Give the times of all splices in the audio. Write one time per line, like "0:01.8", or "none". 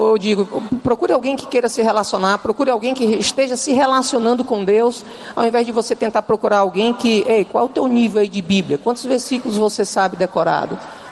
none